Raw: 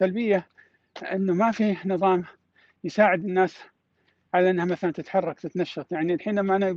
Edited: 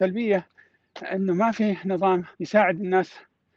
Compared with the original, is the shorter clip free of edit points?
no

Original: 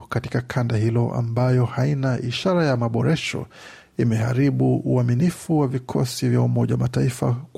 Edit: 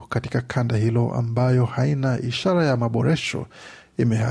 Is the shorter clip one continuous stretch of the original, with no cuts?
yes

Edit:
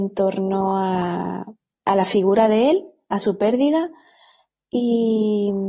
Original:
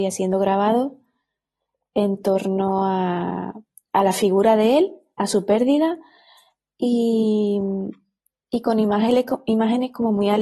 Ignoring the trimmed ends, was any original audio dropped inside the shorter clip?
no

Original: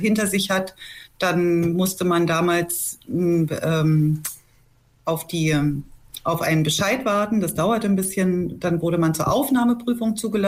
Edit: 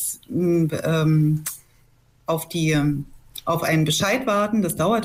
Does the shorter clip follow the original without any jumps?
yes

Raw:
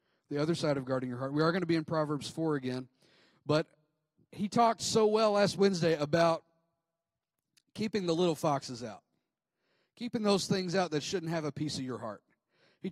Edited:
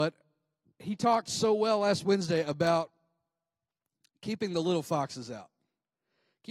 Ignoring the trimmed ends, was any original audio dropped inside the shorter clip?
no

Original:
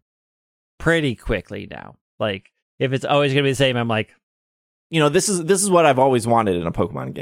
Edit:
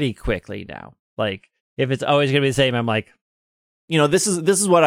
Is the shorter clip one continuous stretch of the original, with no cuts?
yes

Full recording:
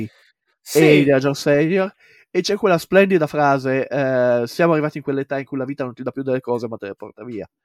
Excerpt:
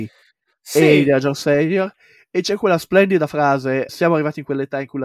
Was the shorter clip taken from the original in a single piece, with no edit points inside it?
no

